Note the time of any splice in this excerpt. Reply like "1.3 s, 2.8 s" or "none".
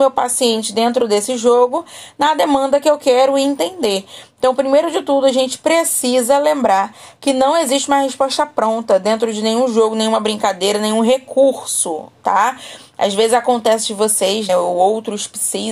14.5 s

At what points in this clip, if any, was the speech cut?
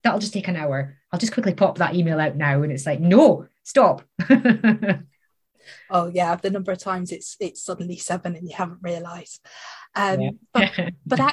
none

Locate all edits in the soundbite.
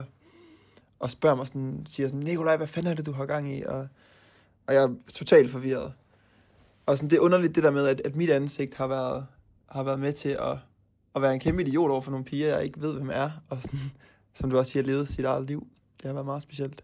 none

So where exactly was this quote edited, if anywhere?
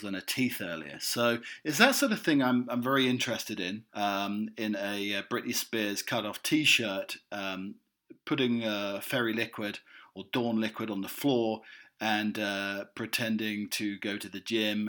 3.9 s

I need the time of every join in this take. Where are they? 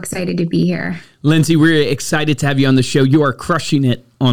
none

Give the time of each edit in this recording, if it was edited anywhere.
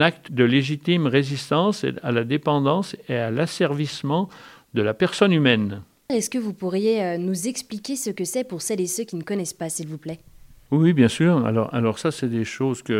6.1 s

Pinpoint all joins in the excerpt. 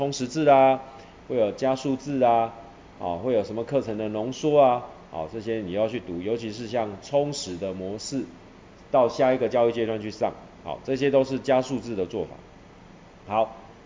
8.8 s

